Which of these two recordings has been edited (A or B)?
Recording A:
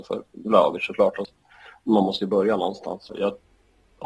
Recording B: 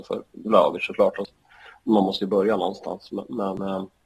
A